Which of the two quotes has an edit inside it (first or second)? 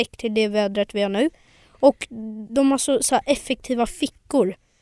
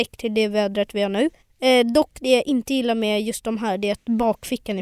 second